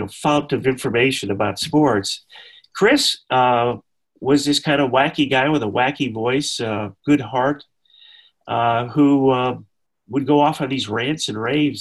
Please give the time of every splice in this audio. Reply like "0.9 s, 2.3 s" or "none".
7.0 s

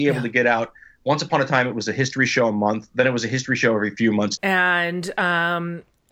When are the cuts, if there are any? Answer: 4.4 s

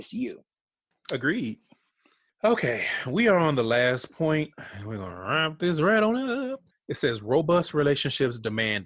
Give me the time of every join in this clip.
6.7 s

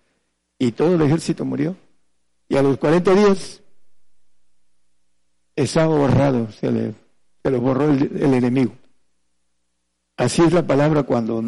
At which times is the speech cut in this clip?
none

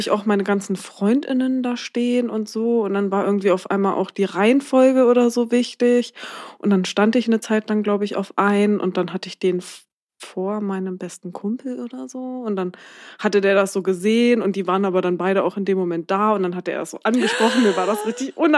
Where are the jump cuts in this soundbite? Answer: none

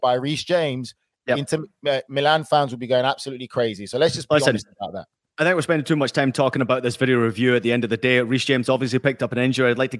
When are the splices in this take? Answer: none

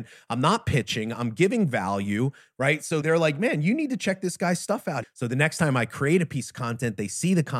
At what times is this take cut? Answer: 5.0 s

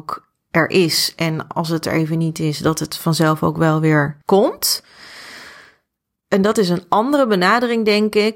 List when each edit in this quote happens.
4.2 s

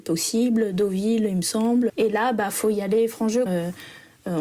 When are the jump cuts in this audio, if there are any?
1.9 s, 3.5 s

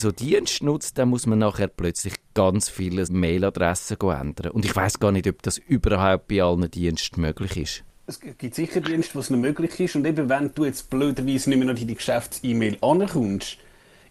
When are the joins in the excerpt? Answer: 3.1 s

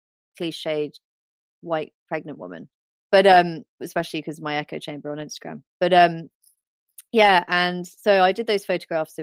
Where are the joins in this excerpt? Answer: 3.1 s

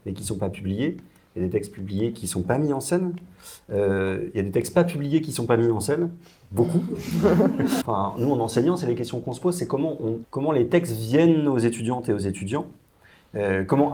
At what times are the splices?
7.8 s, 10.2 s

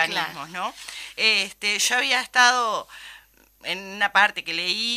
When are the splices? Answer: none

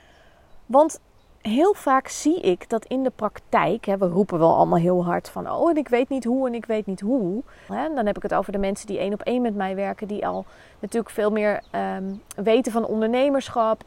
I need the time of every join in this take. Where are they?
7.7 s

